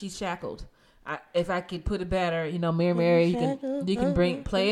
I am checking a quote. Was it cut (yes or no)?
no